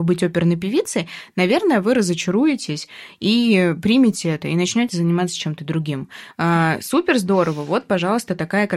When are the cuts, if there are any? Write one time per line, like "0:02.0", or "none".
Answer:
0:06.3